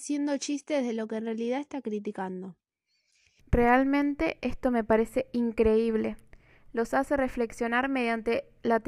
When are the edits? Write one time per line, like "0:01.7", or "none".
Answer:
0:03.4
0:06.7